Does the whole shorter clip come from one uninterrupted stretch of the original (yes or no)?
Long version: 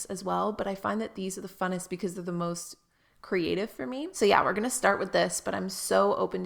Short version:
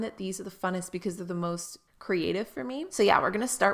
no